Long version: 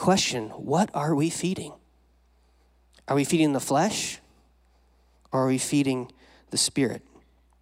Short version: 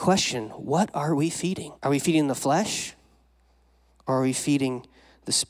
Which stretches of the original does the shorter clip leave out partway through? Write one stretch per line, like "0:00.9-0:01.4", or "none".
0:01.8-0:03.0

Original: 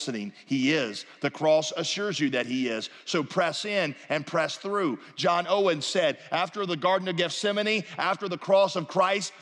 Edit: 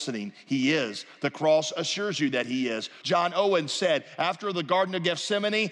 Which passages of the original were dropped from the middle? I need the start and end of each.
0:03.0-0:05.1

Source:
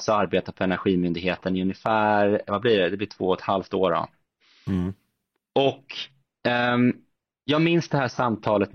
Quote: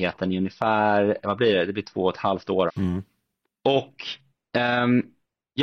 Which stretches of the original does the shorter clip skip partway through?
0:03.9-0:04.6

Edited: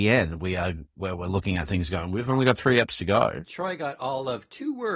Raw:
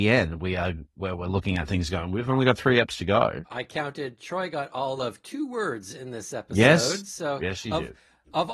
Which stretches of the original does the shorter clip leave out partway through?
0:03.4-0:04.2

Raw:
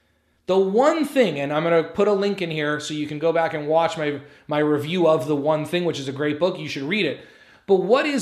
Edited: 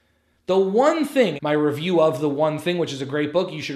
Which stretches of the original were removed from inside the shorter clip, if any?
0:01.4-0:04.4

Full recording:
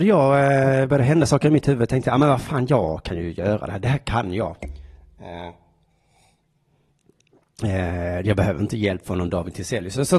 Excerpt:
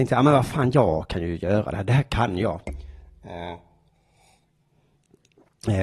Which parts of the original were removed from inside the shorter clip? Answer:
none

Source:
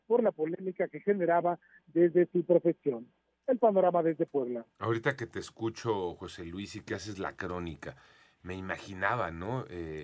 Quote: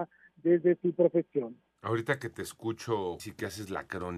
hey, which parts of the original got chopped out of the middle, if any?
0:03.3-0:04.7
0:06.2-0:06.7

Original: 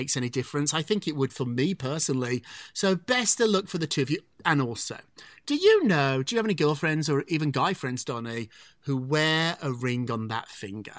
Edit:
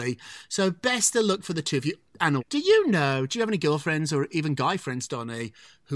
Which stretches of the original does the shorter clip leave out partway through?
0:04.6-0:05.4

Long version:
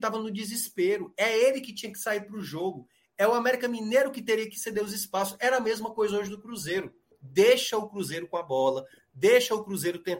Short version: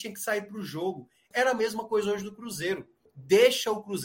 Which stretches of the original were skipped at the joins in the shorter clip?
0:03.1-0:05.4

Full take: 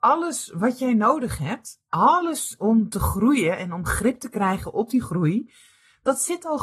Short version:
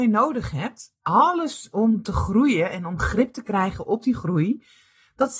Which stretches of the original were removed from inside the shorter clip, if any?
none

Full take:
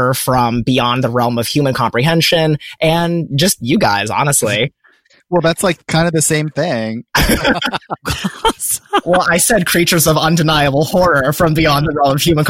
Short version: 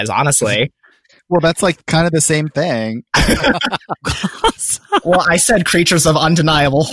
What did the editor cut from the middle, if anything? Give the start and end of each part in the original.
none

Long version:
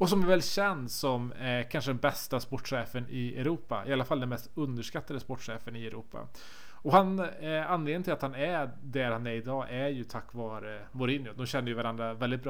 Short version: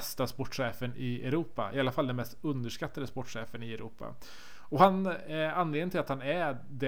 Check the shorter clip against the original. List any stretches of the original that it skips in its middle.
none

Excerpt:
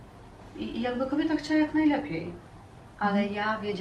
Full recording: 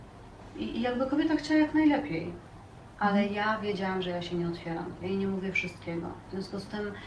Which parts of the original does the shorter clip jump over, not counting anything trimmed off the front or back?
none

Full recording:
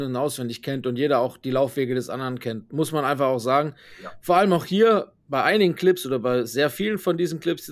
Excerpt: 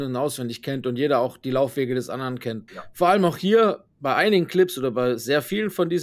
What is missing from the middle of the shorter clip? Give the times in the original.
0:02.7-0:04.0

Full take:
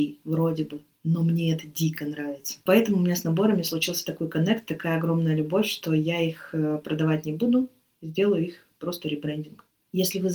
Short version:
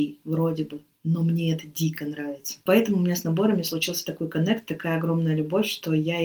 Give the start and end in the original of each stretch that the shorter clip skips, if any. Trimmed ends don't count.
none

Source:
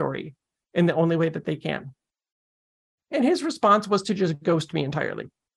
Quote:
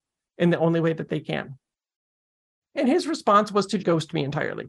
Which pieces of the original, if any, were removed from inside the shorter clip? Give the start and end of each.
0:04.2-0:04.4

